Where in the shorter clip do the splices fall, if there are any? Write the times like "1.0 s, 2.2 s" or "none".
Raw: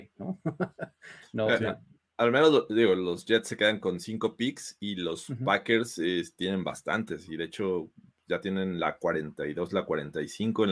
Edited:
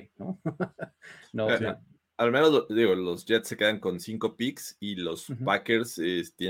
none